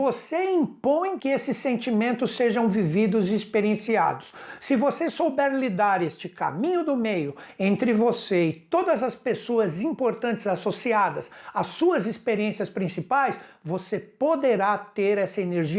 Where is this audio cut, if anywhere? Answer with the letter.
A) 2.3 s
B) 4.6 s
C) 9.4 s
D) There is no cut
D